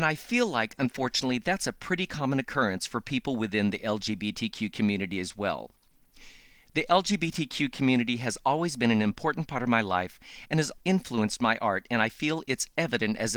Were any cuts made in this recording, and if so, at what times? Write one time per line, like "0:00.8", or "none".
0:10.8